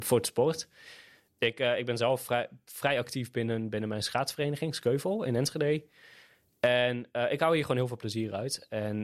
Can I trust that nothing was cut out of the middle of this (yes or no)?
yes